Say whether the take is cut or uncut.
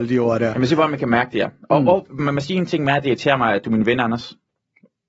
uncut